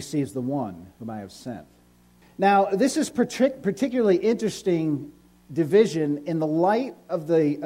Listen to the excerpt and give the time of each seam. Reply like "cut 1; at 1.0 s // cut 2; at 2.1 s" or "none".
cut 1; at 2.2 s